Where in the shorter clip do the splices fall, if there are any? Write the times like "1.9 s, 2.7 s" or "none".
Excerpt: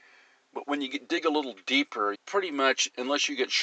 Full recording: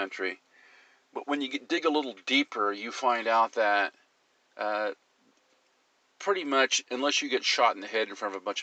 2.1 s